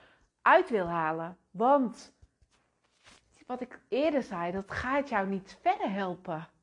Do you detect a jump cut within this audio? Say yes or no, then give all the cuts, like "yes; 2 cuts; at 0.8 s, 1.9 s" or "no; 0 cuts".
no; 0 cuts